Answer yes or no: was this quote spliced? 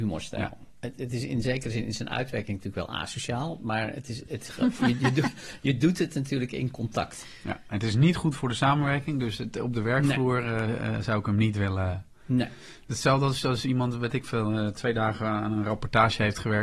no